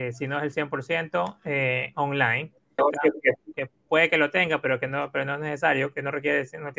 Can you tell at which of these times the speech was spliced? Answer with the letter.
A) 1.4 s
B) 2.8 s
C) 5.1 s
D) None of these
B